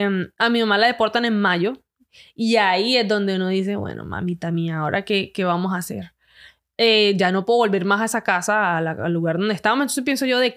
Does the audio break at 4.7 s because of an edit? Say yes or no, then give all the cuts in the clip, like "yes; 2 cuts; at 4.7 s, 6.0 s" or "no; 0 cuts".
no; 0 cuts